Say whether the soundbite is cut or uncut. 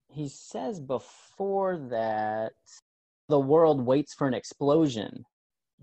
uncut